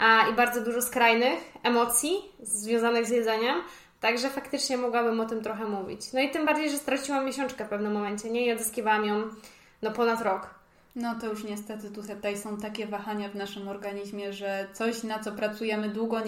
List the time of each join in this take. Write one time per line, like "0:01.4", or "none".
none

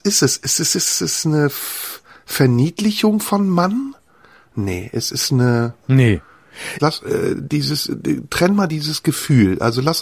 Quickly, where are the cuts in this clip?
0:06.8

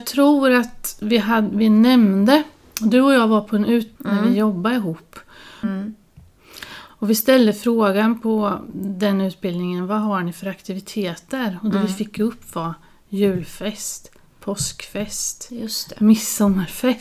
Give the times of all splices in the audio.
0:04.0
0:05.6
0:06.9

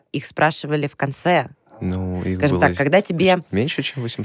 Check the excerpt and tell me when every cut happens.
none

